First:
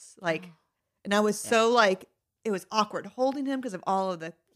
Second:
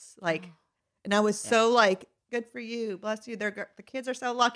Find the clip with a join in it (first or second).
second